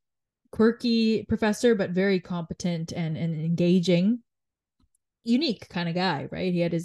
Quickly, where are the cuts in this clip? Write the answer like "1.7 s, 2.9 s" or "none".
none